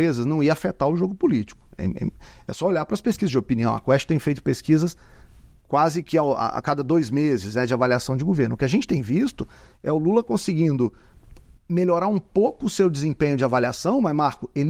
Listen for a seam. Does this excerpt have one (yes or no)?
no